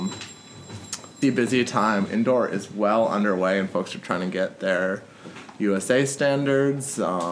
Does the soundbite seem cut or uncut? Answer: cut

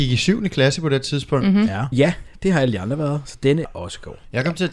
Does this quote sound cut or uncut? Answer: cut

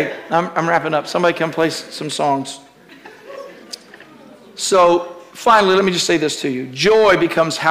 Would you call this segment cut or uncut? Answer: uncut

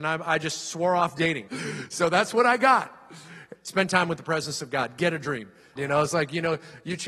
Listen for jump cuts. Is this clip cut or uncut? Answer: cut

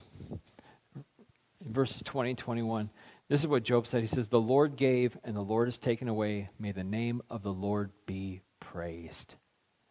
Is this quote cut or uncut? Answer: uncut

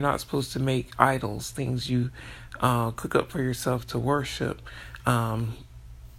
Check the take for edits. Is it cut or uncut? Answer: uncut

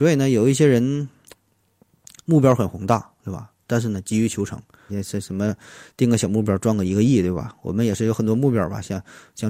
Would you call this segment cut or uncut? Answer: cut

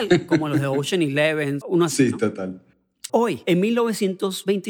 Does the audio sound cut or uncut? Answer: cut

